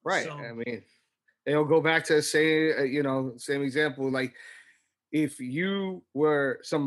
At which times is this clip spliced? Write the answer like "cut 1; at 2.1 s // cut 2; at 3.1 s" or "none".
none